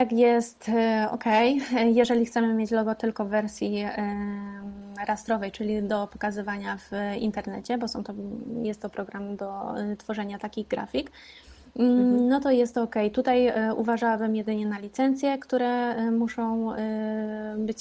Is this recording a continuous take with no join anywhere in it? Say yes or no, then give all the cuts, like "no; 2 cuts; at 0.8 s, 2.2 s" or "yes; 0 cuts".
yes; 0 cuts